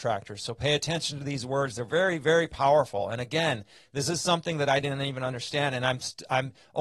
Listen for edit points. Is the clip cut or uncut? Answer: uncut